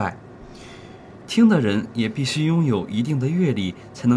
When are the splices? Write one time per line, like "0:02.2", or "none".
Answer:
0:01.2